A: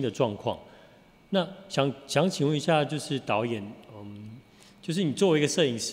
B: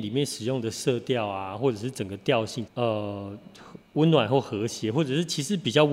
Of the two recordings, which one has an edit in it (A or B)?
B